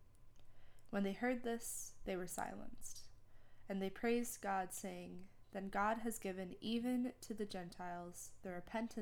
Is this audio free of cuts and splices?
yes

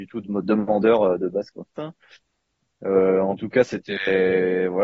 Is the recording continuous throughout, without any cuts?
no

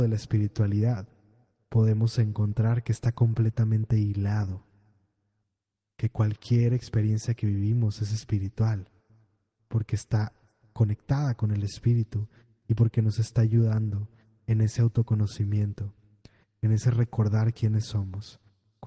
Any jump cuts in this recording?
no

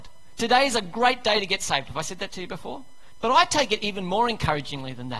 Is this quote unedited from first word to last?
no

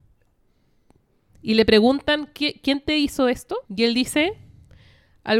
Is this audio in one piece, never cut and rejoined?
no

